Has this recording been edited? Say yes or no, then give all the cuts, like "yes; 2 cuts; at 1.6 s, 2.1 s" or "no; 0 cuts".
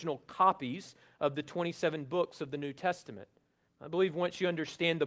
yes; 1 cut; at 3.7 s